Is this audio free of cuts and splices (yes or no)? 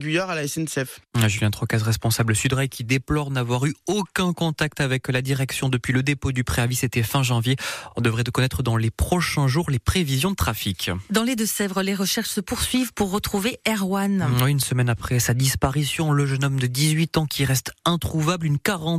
yes